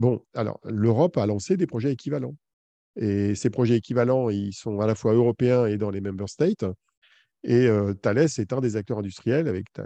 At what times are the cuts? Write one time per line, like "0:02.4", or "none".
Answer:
none